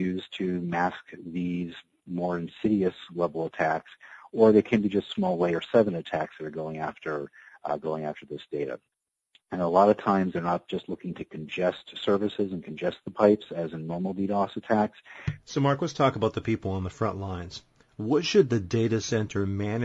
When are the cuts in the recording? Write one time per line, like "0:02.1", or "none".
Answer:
0:15.4